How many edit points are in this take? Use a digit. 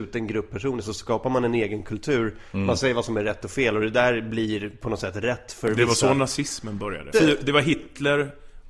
1